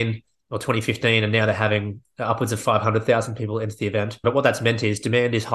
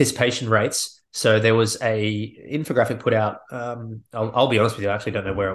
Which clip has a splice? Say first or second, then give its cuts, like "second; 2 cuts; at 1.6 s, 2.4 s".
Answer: first; 1 cut; at 4.2 s